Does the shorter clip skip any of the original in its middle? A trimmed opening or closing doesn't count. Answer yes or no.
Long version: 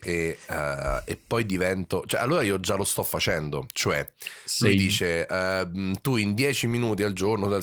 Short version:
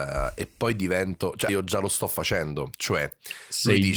yes